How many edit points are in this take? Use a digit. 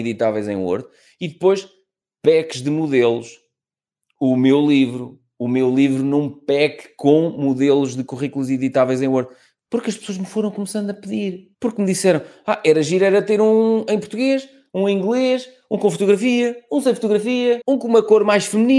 1